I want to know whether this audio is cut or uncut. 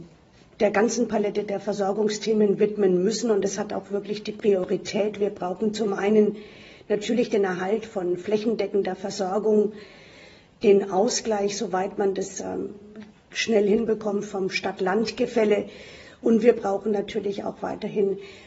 uncut